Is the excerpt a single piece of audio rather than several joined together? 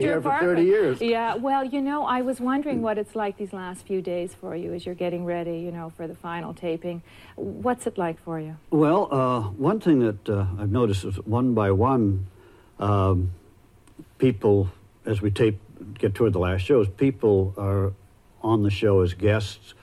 yes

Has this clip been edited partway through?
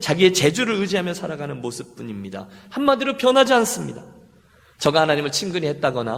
yes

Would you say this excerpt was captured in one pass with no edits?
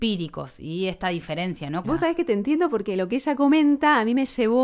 no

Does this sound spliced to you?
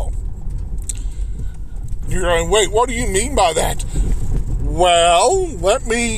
yes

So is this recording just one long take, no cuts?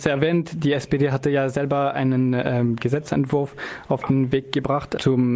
yes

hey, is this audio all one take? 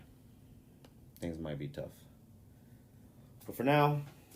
yes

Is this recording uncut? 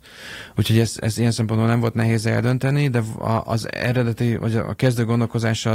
yes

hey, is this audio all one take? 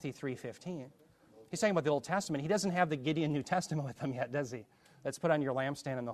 yes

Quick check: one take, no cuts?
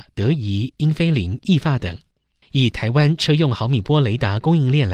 no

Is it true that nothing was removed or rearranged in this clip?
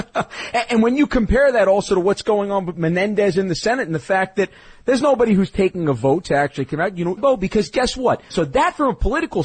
no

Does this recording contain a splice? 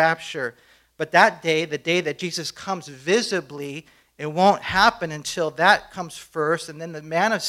no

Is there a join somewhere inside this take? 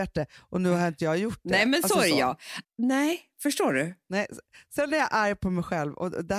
yes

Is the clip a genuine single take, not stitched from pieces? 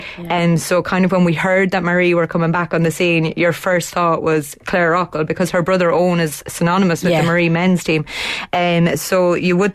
yes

